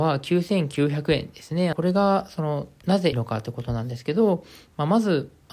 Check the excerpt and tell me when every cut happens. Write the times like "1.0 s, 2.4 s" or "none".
1.7 s, 3.1 s